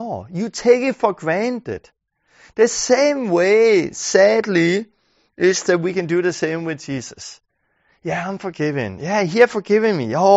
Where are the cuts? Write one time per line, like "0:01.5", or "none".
none